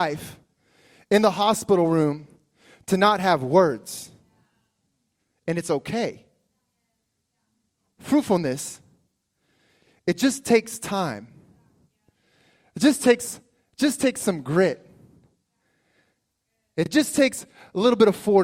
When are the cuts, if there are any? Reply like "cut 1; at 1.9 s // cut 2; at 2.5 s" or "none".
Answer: none